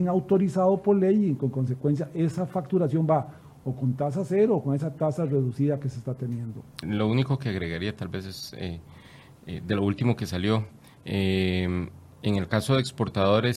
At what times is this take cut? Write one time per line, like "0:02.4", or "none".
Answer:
0:06.8